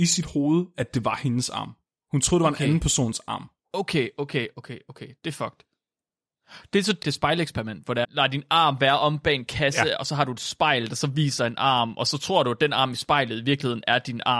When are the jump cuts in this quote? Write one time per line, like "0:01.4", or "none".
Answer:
0:04.5
0:07.0
0:08.0